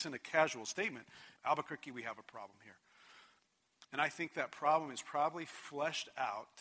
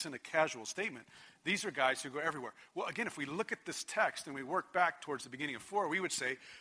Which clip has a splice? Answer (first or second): first